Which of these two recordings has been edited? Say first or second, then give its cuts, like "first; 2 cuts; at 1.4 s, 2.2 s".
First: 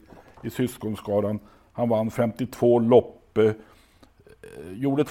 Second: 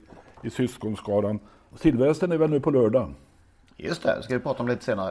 second; 1 cut; at 1.7 s